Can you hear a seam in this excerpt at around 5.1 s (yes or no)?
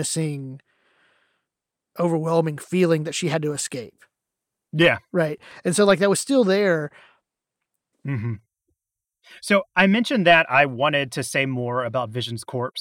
no